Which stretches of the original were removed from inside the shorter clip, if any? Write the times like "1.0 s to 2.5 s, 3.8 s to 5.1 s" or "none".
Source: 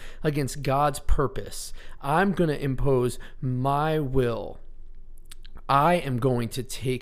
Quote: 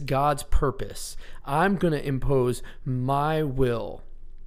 none